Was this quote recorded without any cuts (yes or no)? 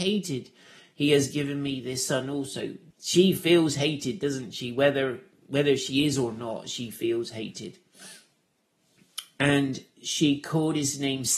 no